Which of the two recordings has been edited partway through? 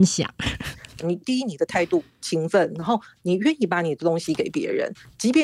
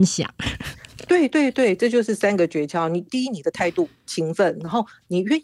first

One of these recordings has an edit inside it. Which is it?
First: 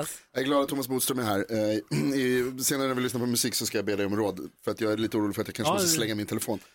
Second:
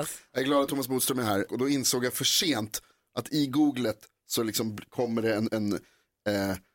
second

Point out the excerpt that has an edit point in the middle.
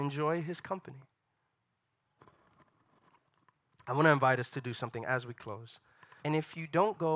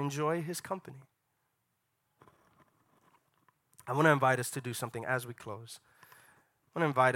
first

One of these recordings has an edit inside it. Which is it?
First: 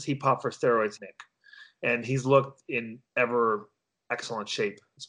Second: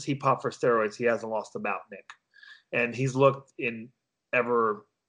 first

